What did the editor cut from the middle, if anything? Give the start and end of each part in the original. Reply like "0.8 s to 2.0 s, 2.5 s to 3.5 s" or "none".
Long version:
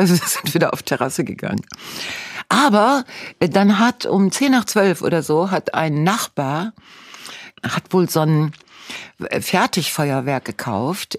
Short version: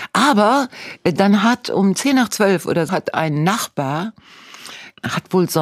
5.2 s to 5.5 s